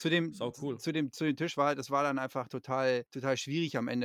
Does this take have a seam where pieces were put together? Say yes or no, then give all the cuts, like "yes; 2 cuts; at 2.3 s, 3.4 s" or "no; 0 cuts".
yes; 1 cut; at 3.1 s